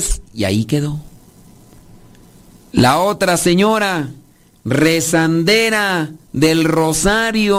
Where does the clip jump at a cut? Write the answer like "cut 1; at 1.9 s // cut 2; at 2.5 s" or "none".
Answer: cut 1; at 6.2 s